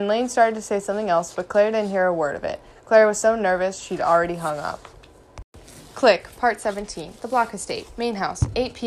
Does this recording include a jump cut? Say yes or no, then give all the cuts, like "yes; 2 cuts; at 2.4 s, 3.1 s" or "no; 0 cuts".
no; 0 cuts